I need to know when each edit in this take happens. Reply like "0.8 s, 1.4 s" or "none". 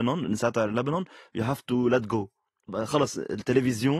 2.7 s